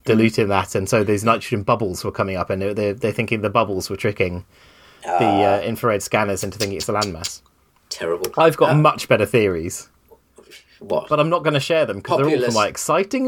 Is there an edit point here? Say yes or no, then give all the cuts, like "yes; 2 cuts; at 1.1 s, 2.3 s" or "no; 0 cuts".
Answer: no; 0 cuts